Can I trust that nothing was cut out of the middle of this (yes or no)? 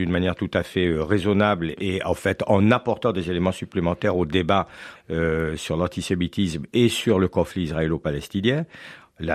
no